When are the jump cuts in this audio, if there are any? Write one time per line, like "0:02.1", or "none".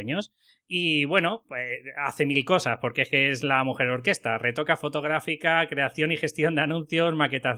none